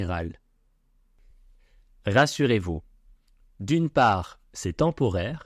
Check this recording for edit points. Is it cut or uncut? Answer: uncut